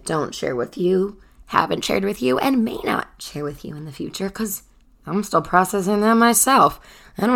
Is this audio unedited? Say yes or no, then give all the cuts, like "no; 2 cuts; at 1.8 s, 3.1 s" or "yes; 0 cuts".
yes; 0 cuts